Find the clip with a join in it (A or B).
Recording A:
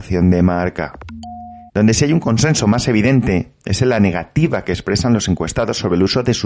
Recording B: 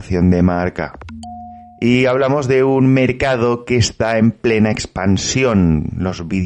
A